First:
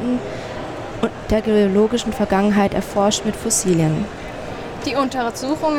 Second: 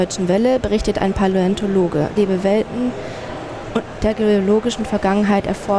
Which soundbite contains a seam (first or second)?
second